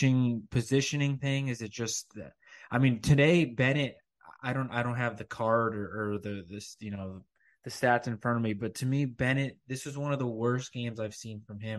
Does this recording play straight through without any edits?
yes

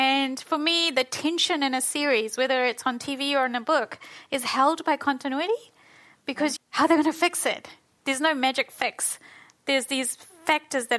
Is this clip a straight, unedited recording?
no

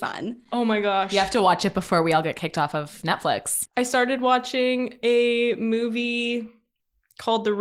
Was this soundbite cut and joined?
yes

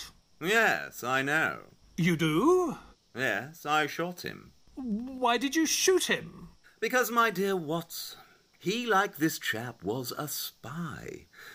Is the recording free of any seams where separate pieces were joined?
yes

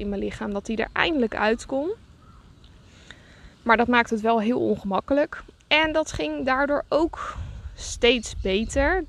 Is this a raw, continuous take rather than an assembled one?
no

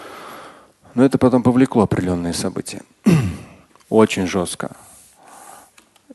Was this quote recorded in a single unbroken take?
no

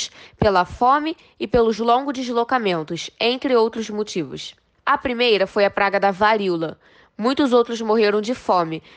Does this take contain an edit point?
no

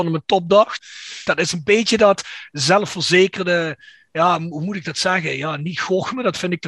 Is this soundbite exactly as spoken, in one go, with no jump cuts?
no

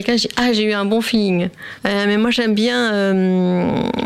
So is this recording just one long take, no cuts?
no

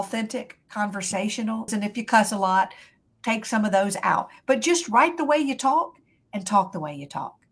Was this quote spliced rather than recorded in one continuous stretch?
yes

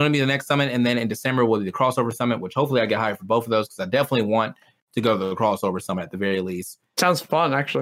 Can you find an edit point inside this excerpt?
no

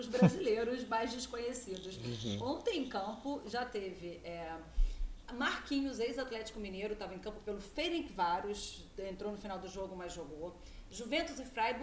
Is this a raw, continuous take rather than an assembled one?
yes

